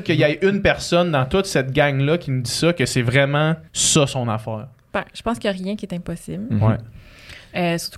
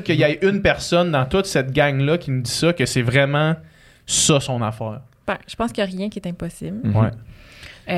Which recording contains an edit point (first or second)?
first